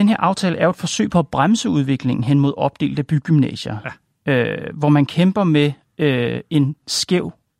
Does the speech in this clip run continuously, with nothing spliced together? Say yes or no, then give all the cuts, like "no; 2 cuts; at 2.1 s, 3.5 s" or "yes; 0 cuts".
yes; 0 cuts